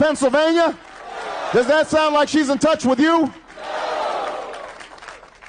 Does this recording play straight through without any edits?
yes; 0 cuts

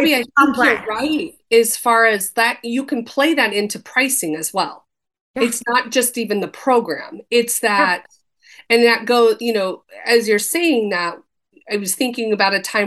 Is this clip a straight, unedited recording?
yes; 0 cuts

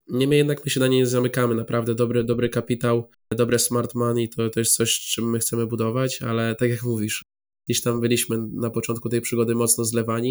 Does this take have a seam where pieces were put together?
no; 0 cuts

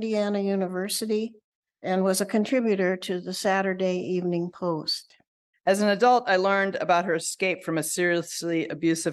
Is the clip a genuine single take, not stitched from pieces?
no; 2 cuts; at 1.8 s, 5.5 s

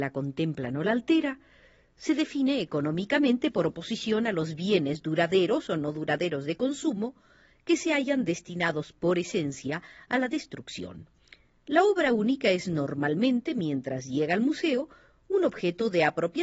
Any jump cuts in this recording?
no; 0 cuts

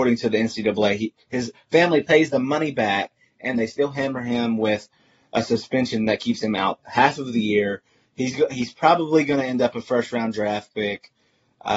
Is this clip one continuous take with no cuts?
yes; 0 cuts

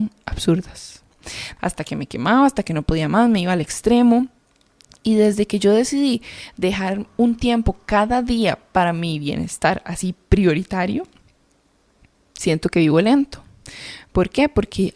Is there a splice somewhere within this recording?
yes; 1 cut; at 1.6 s

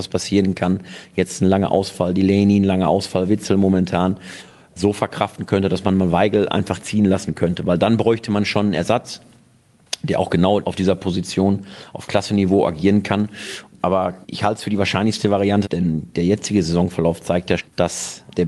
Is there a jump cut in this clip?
yes; 3 cuts; at 13.7 s, 15.6 s, 17.6 s

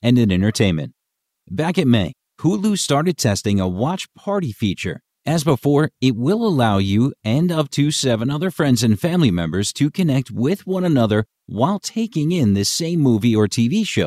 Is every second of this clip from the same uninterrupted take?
no; 1 cut; at 5.1 s

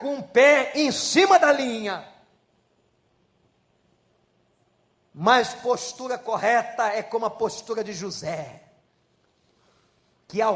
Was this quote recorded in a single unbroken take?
yes; 0 cuts

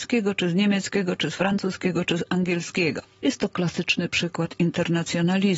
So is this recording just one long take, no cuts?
yes; 0 cuts

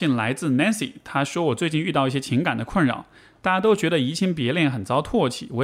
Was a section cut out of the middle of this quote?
no; 0 cuts

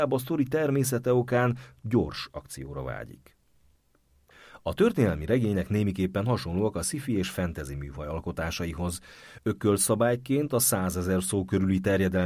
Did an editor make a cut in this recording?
no; 0 cuts

